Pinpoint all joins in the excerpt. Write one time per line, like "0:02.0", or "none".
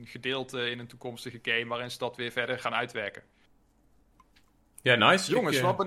0:02.6